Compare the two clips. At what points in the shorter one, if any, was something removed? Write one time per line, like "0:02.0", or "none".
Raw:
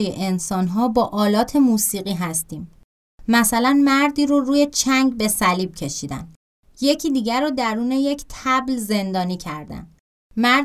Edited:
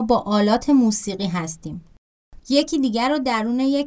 0:02.4